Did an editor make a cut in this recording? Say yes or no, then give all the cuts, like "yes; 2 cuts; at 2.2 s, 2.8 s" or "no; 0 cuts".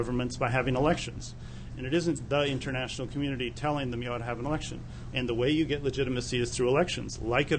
yes; 2 cuts; at 1.7 s, 5.1 s